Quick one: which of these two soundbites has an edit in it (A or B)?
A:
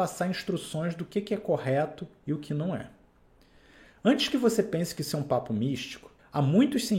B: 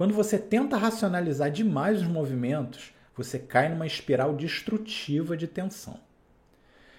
B